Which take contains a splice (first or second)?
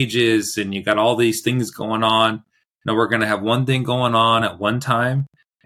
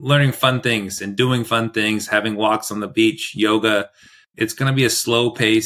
second